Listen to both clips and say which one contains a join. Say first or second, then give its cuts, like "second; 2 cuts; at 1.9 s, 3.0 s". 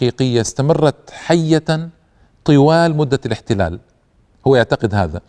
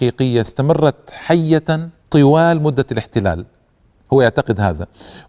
second; 1 cut; at 2.0 s